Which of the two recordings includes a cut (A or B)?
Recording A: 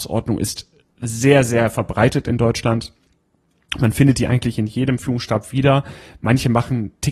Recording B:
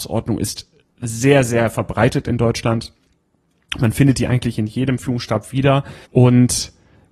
B